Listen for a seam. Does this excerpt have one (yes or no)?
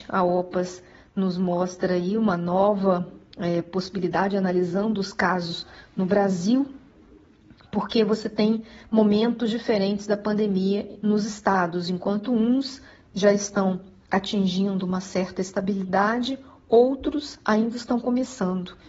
no